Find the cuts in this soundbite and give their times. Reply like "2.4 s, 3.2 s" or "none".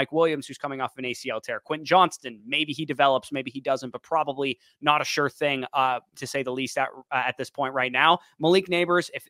none